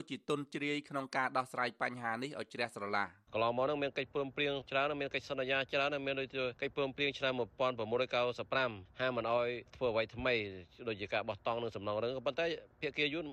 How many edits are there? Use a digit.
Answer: 1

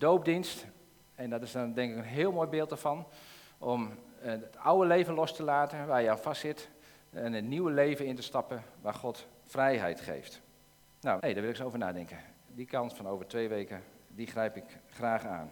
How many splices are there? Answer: 2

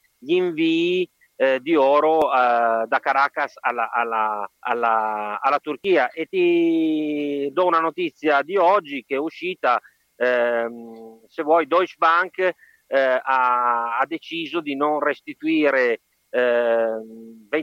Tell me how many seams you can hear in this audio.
1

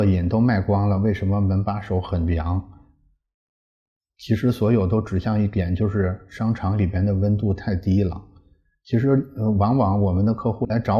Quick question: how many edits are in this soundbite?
0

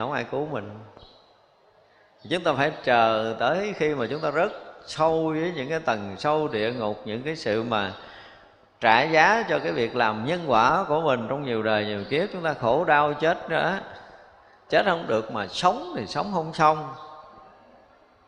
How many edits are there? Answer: 1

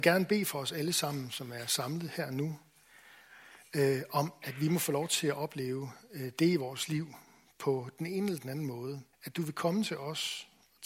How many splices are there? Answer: 1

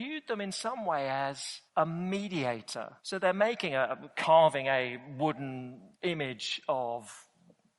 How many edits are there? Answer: 3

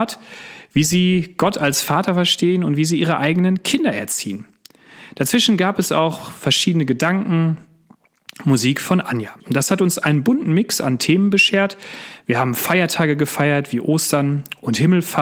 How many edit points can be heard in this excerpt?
1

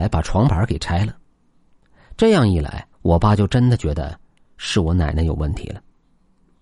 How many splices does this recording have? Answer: 1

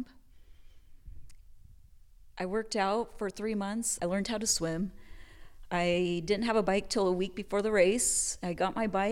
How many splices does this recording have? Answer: 1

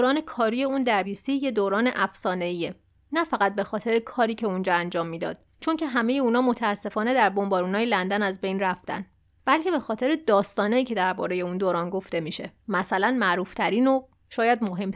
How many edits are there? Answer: 2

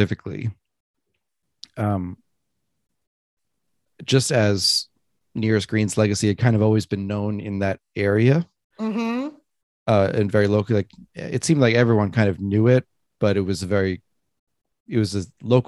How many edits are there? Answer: 0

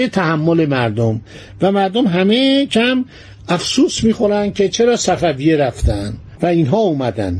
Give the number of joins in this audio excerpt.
1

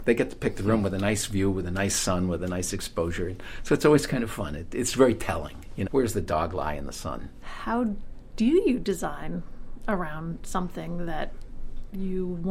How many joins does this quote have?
2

